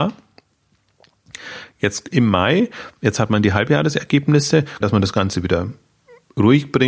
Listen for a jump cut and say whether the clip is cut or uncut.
cut